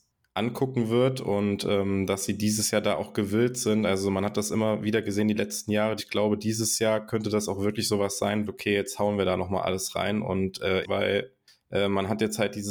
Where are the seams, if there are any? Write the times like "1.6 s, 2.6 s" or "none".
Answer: 6.0 s, 8.5 s, 10.8 s